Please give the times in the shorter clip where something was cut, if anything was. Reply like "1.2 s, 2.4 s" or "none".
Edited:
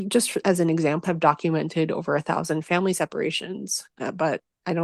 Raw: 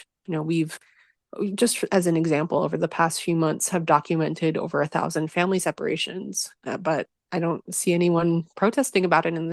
1.0 s

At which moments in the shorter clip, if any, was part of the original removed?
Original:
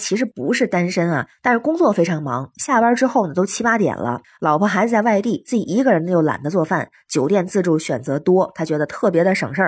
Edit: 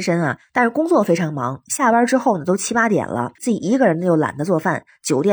3.4 s

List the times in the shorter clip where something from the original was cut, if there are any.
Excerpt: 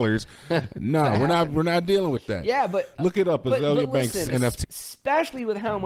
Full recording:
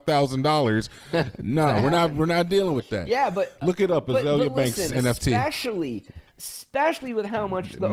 4.6 s

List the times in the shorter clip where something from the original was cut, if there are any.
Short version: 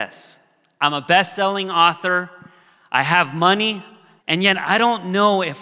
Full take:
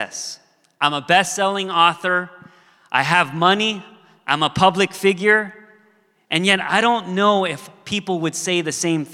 4.2 s

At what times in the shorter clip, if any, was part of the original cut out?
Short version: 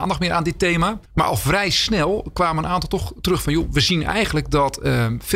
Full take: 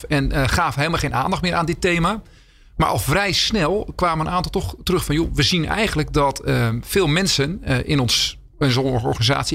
1.1 s

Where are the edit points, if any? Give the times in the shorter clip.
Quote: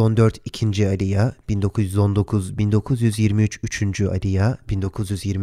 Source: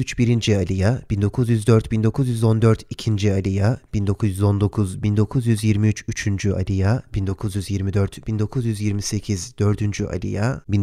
none

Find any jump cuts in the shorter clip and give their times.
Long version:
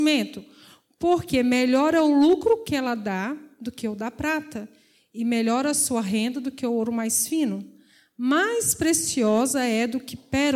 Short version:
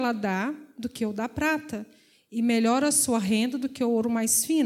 none

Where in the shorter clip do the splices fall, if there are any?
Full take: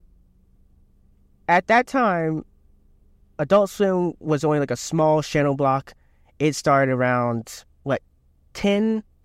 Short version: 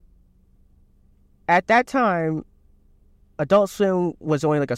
none

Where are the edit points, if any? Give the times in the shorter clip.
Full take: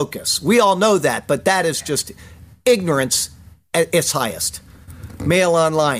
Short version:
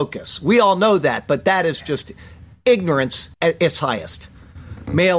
3.3 s

